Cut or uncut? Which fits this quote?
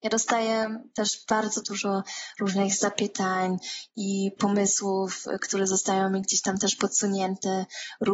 uncut